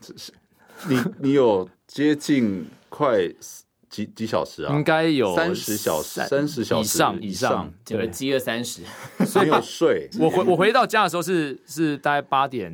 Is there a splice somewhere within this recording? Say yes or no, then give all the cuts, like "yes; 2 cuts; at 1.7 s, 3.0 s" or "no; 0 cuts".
yes; 1 cut; at 10.1 s